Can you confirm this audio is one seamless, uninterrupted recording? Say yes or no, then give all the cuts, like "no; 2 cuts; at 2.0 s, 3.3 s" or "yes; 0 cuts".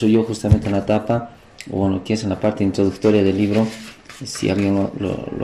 yes; 0 cuts